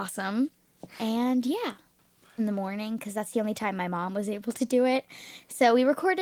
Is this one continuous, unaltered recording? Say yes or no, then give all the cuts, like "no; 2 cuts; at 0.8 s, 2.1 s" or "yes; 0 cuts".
no; 1 cut; at 2.4 s